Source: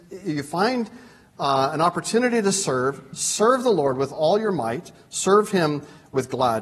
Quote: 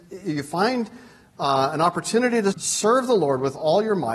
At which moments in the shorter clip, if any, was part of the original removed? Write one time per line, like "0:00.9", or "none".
0:02.5